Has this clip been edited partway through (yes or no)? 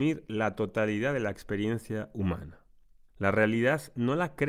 yes